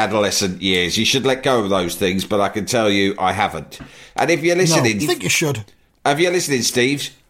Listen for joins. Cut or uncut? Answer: cut